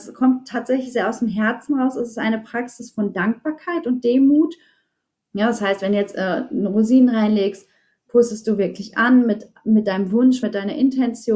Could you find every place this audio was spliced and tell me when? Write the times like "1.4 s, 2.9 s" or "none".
5.2 s, 10.4 s